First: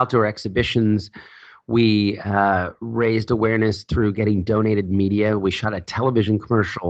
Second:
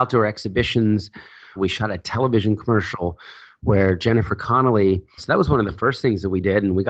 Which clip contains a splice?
second; 2 cuts; at 1.6 s, 5.2 s

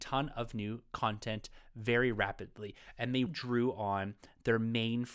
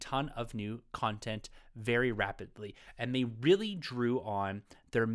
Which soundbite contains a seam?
first; 1 cut; at 3.3 s

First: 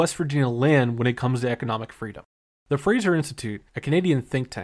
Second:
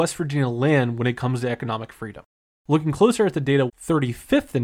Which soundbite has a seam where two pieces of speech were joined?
second; 2 cuts; at 2.6 s, 3.7 s

